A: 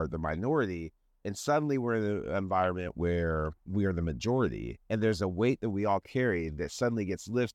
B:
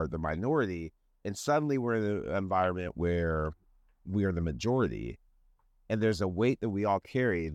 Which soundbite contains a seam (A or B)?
A